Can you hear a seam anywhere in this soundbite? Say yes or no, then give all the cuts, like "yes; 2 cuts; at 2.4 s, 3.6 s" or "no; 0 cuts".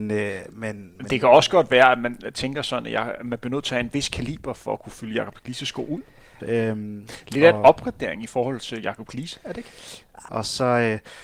yes; 2 cuts; at 6.4 s, 10.3 s